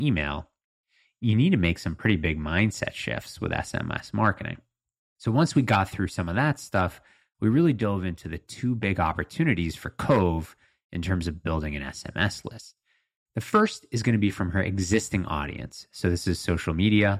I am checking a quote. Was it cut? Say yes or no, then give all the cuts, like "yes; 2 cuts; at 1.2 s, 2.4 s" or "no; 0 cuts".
no; 0 cuts